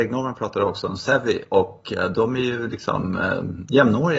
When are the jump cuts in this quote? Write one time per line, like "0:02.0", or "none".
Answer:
0:02.1